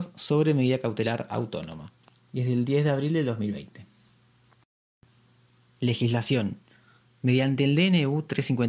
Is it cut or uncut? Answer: uncut